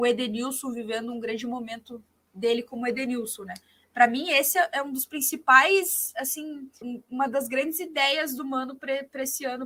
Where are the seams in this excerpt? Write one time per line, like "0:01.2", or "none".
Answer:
0:06.8